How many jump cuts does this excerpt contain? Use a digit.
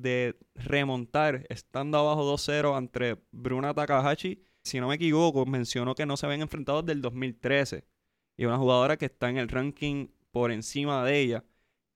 1